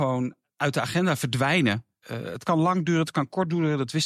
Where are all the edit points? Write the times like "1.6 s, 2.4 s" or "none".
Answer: 2.0 s